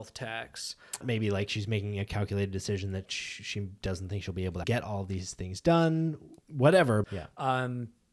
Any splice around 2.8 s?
no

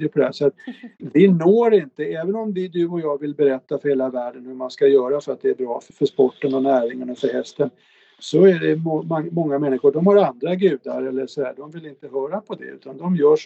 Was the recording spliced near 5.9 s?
yes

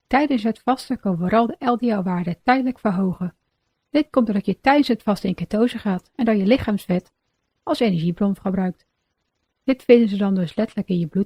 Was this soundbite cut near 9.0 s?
no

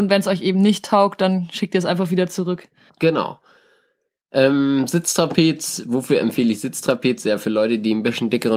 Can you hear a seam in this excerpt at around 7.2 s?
no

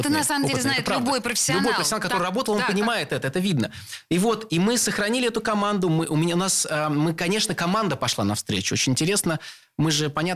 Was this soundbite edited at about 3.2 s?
no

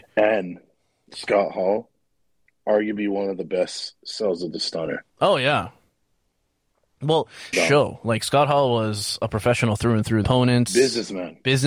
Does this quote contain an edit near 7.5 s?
yes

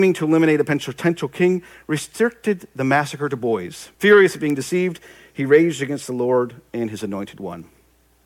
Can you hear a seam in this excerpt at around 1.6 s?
no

